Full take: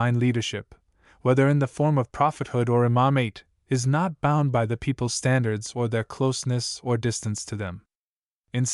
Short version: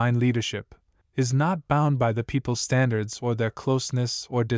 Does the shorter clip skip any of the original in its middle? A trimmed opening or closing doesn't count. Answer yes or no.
yes